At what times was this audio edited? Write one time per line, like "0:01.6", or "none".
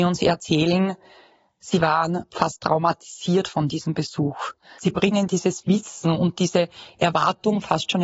0:04.8